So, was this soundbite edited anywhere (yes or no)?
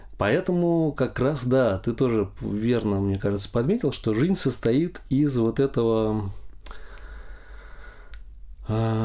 no